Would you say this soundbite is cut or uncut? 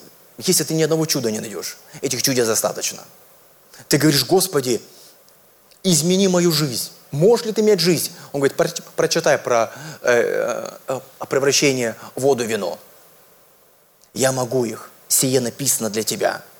uncut